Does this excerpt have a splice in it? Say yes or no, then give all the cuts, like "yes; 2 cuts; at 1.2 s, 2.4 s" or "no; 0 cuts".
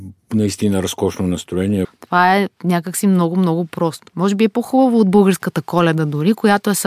yes; 2 cuts; at 1.8 s, 4.1 s